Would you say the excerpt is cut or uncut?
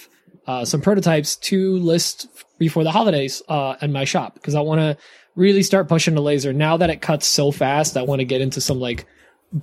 uncut